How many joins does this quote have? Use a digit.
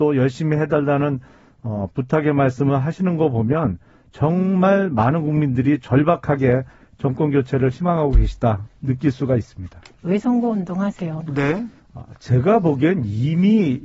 2